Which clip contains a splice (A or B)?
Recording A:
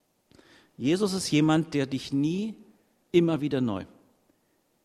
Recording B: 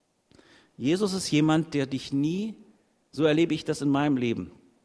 A